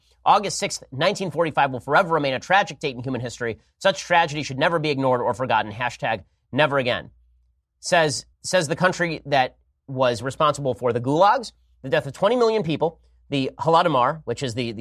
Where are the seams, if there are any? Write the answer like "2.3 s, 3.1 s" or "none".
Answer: 8.3 s